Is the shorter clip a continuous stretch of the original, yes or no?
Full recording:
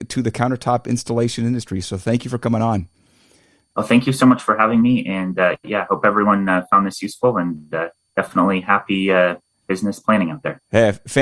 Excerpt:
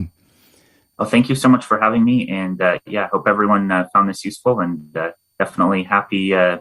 yes